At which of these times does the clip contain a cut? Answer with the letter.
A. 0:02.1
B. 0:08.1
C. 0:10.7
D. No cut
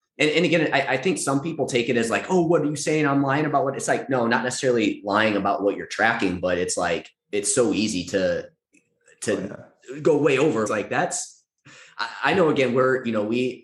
C